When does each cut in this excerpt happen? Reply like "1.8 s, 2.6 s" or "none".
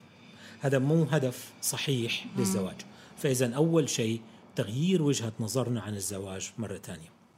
none